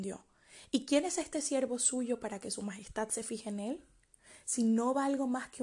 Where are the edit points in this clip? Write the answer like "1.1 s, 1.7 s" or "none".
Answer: none